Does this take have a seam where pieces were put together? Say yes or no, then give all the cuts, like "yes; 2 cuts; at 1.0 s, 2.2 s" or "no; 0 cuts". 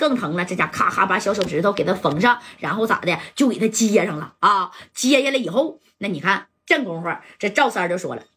no; 0 cuts